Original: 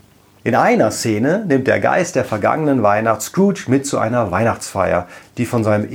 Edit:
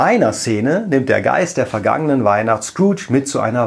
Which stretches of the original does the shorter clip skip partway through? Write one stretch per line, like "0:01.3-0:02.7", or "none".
none